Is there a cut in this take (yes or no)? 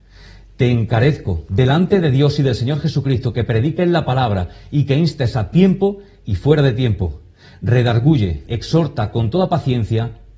yes